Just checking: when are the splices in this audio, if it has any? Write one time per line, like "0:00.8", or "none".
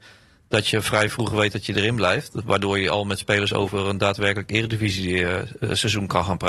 none